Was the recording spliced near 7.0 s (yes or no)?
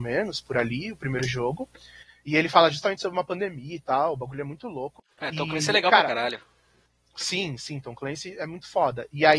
no